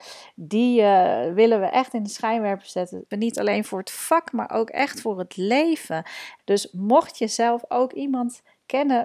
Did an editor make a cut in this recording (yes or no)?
yes